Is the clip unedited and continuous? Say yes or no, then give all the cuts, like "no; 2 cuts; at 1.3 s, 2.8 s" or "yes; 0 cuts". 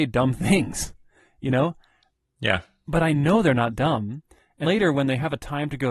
no; 1 cut; at 4.6 s